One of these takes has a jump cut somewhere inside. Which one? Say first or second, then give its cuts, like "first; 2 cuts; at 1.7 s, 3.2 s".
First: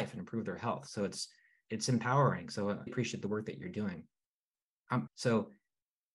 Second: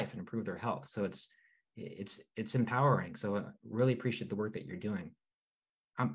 first; 3 cuts; at 1.7 s, 2.9 s, 5.1 s